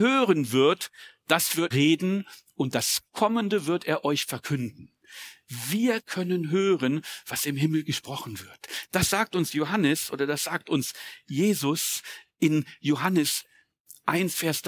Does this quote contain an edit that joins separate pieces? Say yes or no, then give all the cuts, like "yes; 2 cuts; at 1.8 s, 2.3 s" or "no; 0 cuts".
yes; 2 cuts; at 1.7 s, 8.9 s